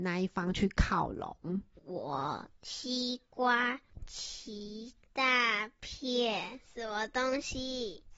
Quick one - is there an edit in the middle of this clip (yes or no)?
yes